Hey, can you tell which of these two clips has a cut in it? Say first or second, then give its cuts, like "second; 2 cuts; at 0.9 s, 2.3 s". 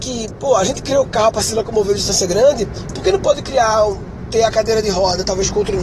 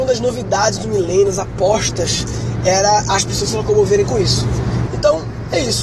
second; 1 cut; at 4.9 s